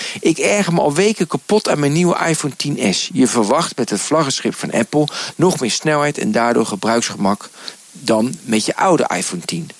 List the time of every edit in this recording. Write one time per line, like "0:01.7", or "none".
0:05.3